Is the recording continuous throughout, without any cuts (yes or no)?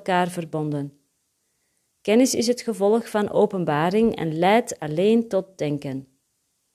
yes